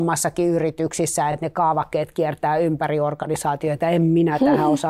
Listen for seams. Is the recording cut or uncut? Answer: uncut